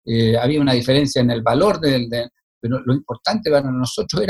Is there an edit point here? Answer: no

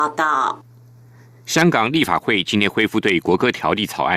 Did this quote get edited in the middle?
no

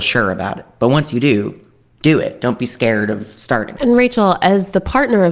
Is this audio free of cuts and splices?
no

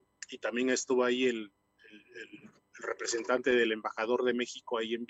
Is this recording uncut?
yes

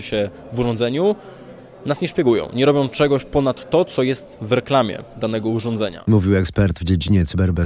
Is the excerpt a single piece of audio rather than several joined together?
yes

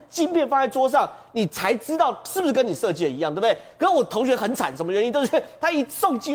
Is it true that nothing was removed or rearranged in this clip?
yes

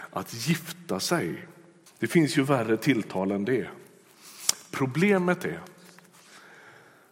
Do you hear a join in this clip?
yes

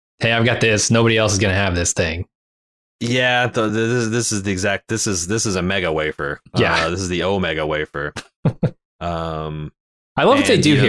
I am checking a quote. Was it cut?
no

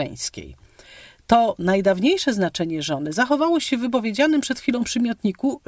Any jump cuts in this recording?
no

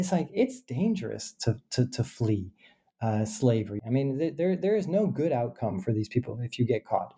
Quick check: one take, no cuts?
no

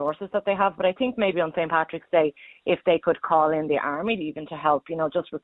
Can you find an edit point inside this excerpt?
no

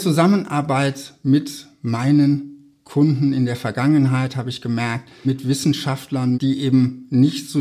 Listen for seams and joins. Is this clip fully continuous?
no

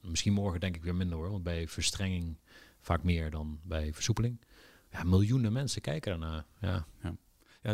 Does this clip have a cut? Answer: no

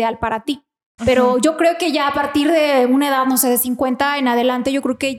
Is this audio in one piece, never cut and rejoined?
no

